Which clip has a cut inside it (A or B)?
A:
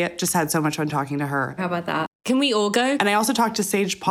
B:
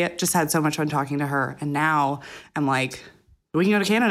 A